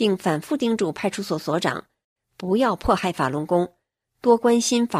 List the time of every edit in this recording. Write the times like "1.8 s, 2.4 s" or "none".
none